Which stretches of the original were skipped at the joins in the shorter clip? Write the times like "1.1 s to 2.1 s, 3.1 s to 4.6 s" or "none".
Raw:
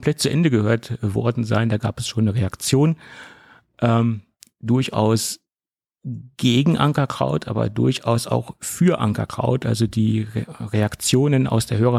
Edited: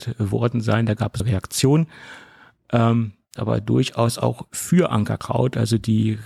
2.0 s to 2.3 s, 4.4 s to 7.4 s